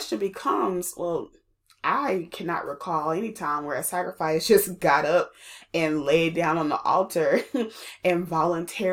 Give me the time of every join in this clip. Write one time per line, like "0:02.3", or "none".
none